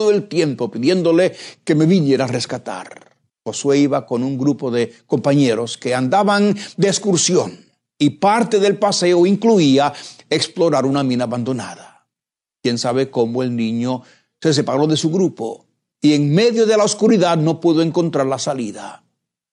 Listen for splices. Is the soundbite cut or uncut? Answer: cut